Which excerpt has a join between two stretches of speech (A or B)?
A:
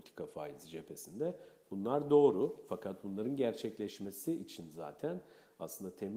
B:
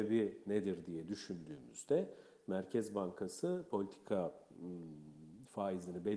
A